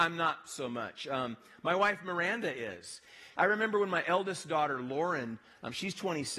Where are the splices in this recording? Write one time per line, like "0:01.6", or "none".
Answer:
0:03.3